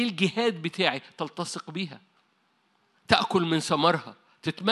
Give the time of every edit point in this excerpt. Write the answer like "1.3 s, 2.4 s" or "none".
2.9 s